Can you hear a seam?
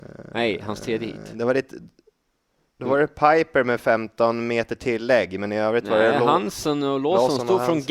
no; 0 cuts

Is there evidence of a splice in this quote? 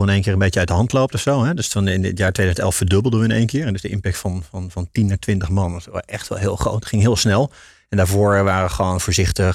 no; 0 cuts

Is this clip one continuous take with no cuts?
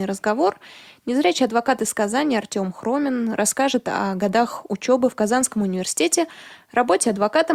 yes; 0 cuts

